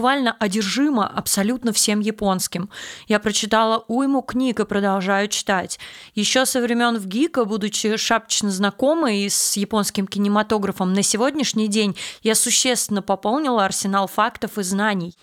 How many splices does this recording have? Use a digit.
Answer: 0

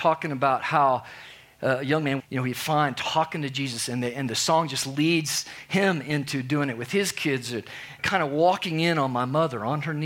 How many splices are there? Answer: 2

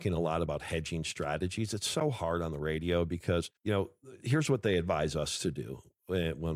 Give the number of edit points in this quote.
1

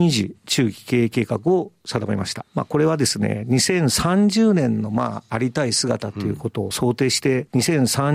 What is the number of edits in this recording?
0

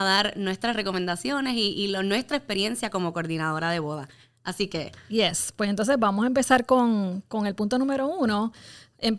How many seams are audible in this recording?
0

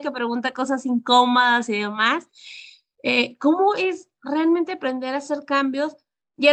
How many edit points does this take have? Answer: 0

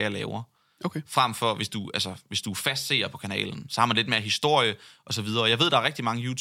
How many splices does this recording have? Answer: 0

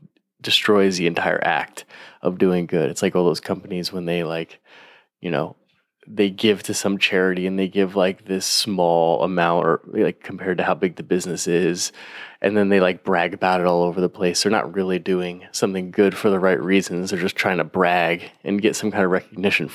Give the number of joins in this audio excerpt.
0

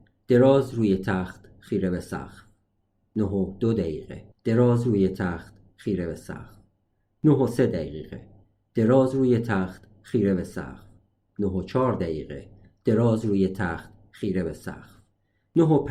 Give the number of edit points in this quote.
1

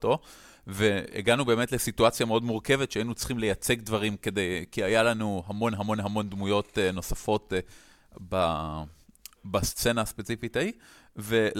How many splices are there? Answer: 0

